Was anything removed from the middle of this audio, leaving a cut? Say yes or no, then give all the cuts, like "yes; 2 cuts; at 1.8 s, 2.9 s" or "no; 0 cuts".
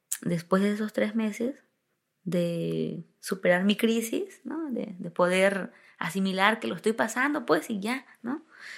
no; 0 cuts